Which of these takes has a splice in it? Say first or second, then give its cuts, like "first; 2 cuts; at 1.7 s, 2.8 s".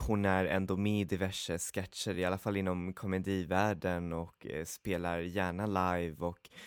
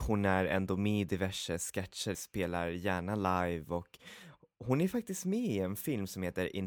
second; 1 cut; at 2.1 s